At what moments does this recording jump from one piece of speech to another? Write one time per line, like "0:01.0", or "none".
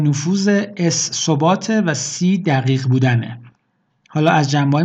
none